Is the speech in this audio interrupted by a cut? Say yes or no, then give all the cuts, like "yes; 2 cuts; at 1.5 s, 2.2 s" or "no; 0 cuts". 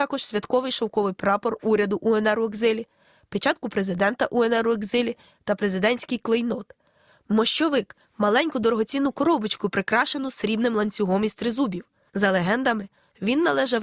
yes; 1 cut; at 12.1 s